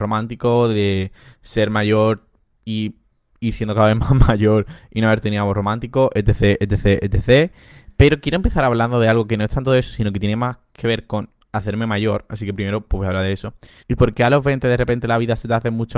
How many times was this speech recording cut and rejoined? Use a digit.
1